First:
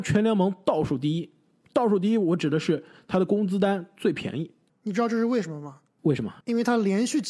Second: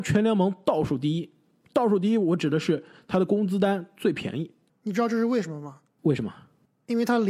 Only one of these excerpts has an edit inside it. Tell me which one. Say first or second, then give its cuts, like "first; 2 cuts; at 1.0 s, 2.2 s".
first; 1 cut; at 6.4 s